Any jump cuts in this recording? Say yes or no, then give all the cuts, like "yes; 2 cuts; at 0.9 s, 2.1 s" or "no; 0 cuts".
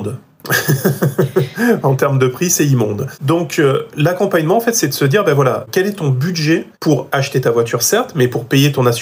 no; 0 cuts